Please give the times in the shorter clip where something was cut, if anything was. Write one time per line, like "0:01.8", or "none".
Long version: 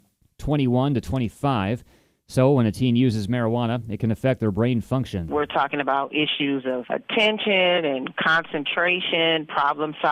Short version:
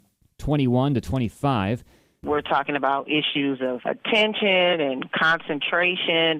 0:02.2